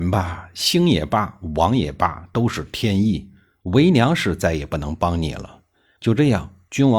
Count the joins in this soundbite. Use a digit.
0